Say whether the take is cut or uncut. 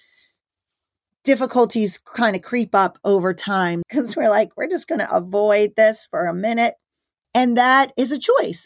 cut